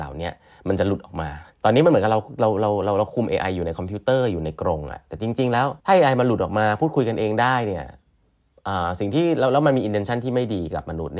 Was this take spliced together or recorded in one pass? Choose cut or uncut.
cut